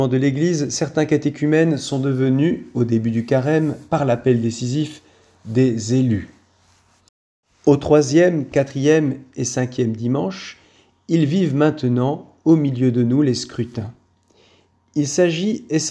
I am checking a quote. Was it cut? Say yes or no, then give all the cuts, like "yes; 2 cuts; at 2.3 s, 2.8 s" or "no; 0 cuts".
no; 0 cuts